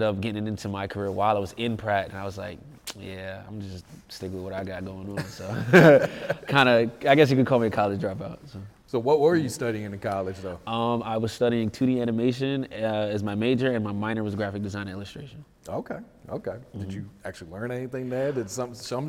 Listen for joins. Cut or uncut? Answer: uncut